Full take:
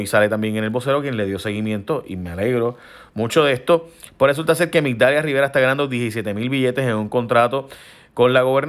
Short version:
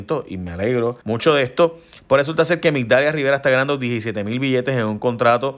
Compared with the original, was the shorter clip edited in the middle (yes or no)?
yes